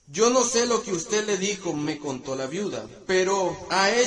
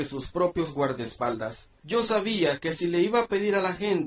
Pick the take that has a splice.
second; 1 cut; at 1.8 s

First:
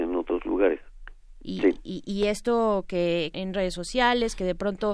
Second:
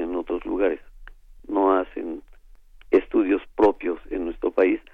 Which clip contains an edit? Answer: first; 2 cuts; at 1.4 s, 3.3 s

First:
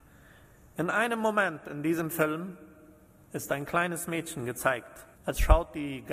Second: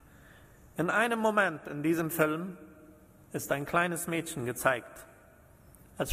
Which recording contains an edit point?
first; 1 cut; at 5.1 s

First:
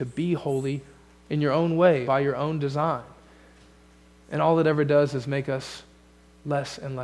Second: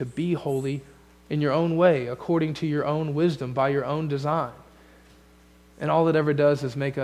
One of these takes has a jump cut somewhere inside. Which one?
first; 1 cut; at 2.0 s

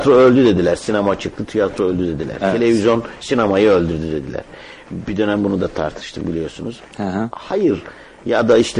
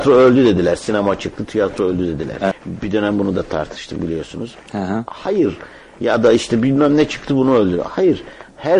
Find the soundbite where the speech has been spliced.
second; 1 cut; at 2.5 s

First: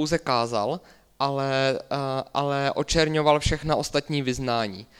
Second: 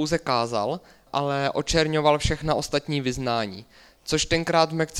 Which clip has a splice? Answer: second; 1 cut; at 1.1 s

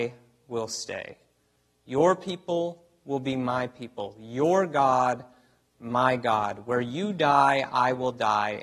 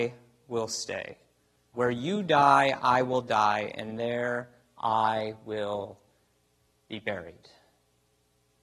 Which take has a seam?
second; 1 cut; at 1.7 s

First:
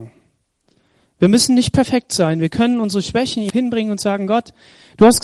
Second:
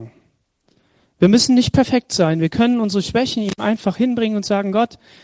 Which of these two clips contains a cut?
first; 1 cut; at 3.5 s

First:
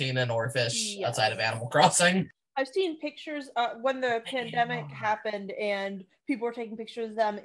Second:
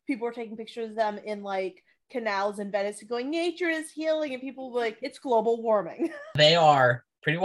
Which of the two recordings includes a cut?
second; 1 cut; at 5.0 s

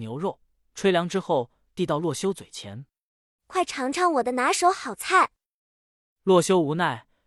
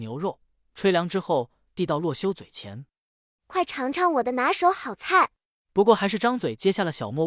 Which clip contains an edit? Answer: second; 1 cut; at 5.6 s

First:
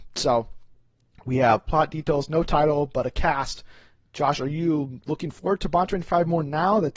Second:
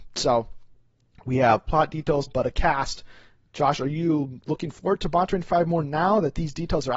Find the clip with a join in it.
second; 1 cut; at 2.3 s

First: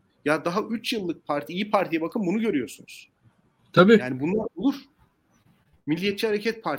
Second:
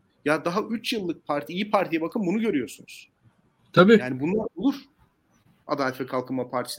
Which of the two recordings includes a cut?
second; 1 cut; at 5.6 s

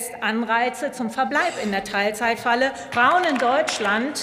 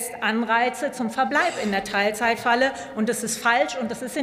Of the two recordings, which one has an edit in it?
first; 1 cut; at 2.9 s

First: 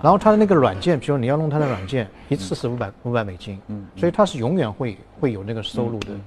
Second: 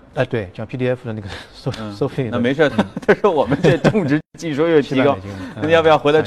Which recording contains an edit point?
second; 1 cut; at 2.7 s

